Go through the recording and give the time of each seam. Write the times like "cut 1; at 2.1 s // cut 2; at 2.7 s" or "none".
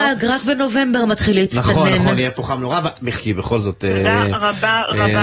cut 1; at 3.2 s